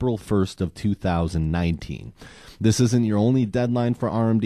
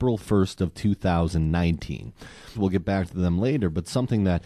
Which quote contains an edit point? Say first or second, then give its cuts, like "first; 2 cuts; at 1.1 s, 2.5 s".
second; 1 cut; at 2.6 s